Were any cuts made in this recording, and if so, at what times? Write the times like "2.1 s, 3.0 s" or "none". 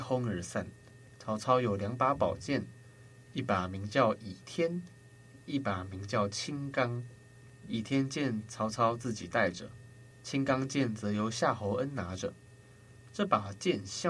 1.1 s